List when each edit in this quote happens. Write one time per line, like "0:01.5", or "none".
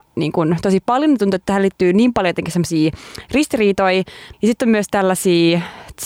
0:04.3